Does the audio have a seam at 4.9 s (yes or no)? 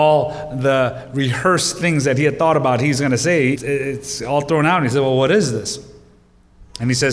no